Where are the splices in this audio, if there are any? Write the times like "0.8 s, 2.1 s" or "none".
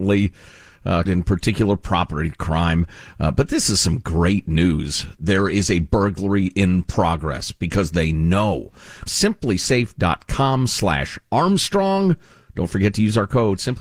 1.1 s, 5.2 s, 9.1 s